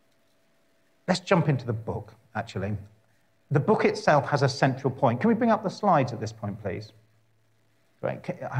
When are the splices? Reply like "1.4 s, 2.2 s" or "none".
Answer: none